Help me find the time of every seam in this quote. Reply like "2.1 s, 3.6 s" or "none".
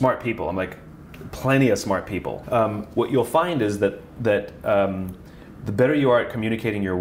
2.4 s